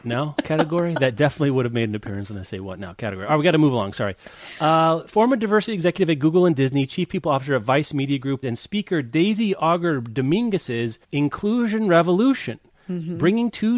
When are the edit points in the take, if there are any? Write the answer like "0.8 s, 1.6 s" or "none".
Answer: 8.4 s, 11.0 s